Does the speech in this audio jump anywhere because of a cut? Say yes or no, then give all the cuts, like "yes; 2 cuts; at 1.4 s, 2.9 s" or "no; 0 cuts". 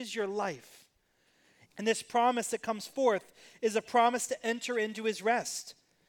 yes; 1 cut; at 1.7 s